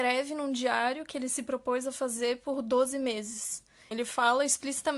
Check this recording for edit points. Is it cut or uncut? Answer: cut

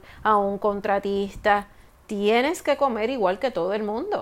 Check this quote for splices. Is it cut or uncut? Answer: uncut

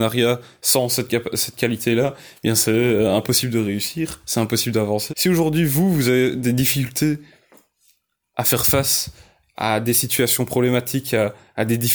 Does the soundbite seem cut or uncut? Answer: cut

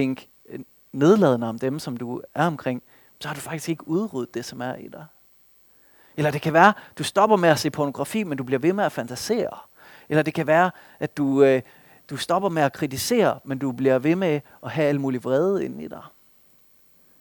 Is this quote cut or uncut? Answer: uncut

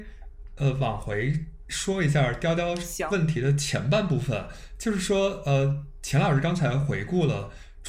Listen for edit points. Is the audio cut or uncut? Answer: uncut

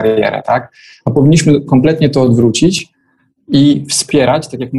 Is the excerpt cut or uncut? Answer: uncut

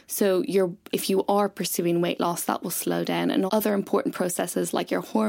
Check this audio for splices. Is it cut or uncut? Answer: cut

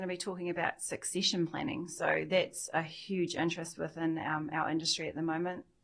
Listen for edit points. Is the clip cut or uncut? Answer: uncut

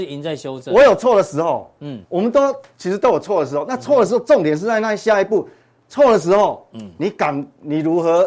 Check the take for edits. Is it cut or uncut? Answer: cut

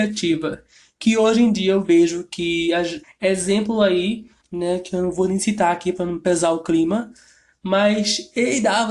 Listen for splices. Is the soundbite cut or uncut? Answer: cut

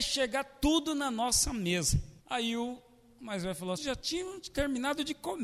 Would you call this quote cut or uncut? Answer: cut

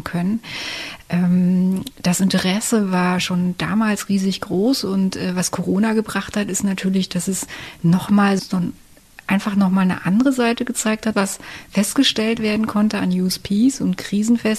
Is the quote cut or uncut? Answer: cut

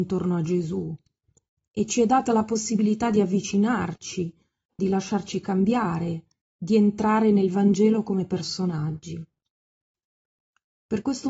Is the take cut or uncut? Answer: cut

